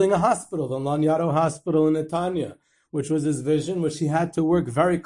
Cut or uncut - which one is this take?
uncut